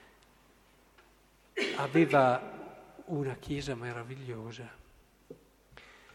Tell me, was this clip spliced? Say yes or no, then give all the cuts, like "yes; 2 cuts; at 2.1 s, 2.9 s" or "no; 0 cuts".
no; 0 cuts